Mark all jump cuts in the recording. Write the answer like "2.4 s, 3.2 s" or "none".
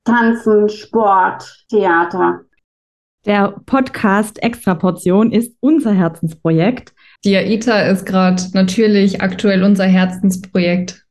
7.2 s